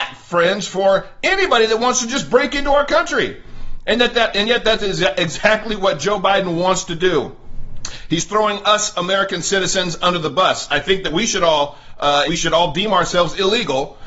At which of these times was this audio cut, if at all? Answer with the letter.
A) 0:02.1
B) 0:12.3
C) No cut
B